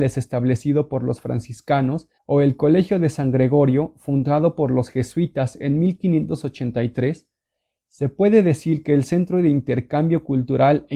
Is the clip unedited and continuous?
no; 1 cut; at 2.2 s

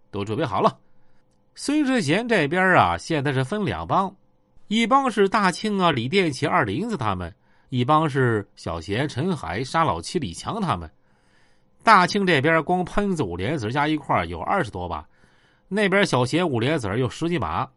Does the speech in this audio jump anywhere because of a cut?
no; 0 cuts

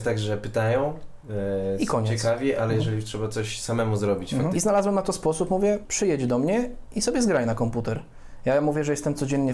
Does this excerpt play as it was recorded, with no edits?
no; 2 cuts; at 4.5 s, 5.8 s

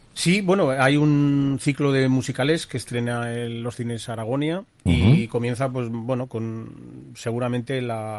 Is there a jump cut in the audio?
no; 0 cuts

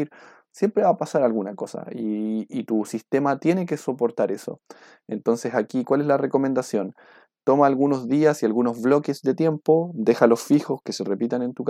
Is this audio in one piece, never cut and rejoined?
yes; 0 cuts

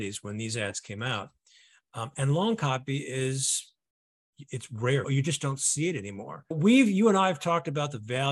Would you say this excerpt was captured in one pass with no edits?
no; 2 cuts; at 5.0 s, 6.5 s

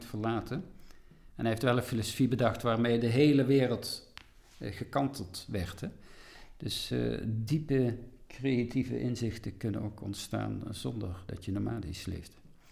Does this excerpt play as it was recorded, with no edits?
yes; 0 cuts

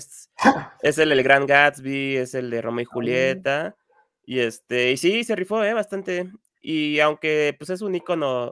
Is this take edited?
no; 0 cuts

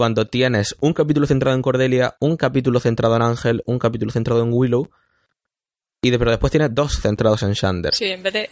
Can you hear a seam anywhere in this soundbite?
no; 0 cuts

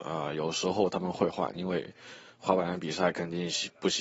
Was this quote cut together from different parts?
yes; 1 cut; at 1.6 s

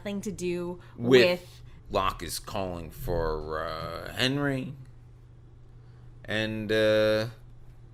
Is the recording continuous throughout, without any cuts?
no; 1 cut; at 1.8 s

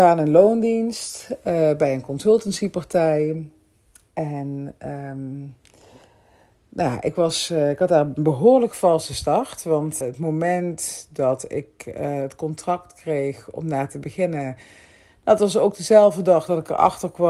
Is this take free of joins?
no; 1 cut; at 10.0 s

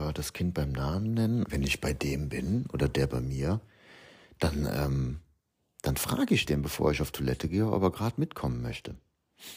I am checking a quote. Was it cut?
yes; 1 cut; at 1.5 s

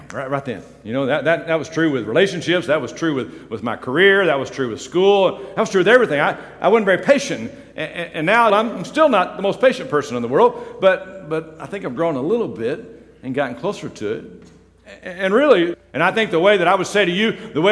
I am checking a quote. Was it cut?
yes; 2 cuts; at 8.5 s, 15.7 s

